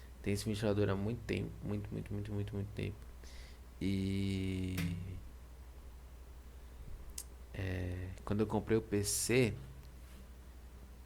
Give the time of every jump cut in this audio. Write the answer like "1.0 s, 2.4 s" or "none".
none